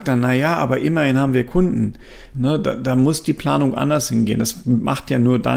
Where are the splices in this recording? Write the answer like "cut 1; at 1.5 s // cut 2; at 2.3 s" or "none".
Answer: cut 1; at 2.3 s